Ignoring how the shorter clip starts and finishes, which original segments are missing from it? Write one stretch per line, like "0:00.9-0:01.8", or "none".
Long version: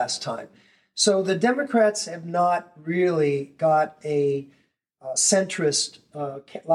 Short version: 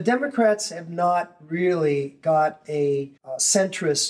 0:04.5-0:04.9